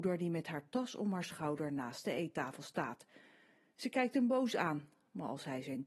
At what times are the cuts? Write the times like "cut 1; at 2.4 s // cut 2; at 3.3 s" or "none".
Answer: none